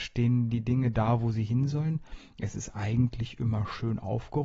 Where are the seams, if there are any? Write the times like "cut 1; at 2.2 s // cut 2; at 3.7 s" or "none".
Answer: none